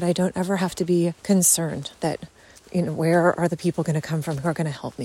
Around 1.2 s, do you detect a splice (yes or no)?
yes